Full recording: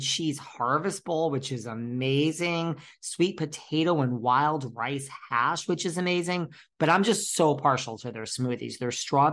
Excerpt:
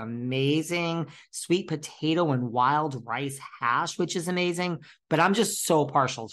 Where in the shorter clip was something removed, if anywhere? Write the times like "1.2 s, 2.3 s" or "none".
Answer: none

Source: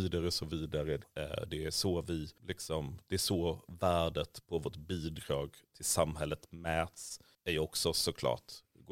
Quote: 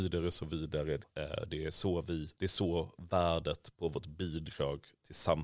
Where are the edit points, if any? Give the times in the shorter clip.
2.3 s

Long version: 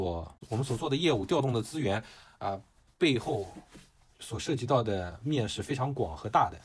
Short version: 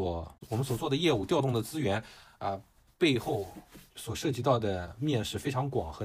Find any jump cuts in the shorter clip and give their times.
3.9 s

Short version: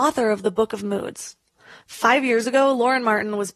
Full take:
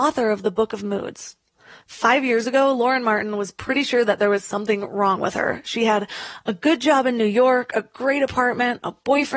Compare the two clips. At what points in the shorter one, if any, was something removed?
none

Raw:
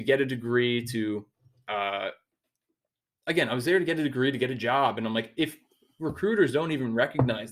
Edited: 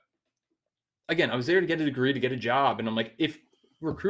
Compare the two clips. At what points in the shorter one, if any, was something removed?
none

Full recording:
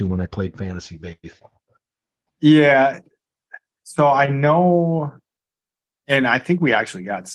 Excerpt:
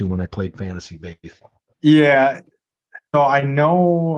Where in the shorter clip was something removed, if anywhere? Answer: 1.7 s, 3.1 s

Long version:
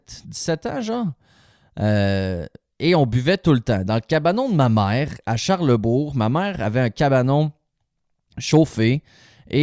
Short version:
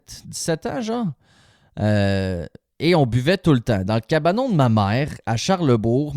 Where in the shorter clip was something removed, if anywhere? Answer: none

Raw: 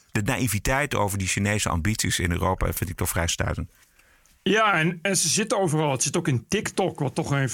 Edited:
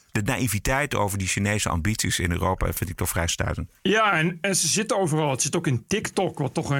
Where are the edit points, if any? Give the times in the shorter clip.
3.8 s

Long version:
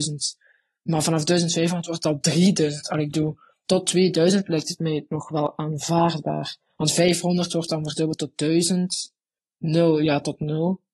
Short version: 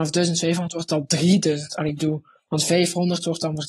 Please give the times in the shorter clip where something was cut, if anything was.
2.5 s

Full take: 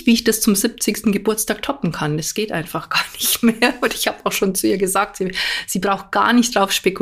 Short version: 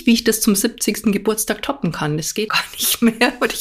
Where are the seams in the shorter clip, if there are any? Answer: 2.5 s

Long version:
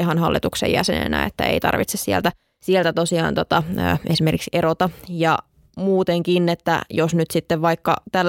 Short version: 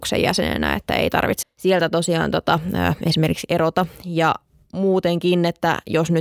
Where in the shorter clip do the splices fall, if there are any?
1.4 s

